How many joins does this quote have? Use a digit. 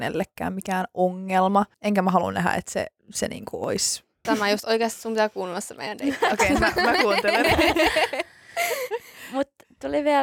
2